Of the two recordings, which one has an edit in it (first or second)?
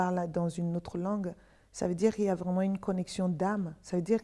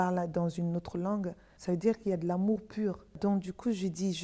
second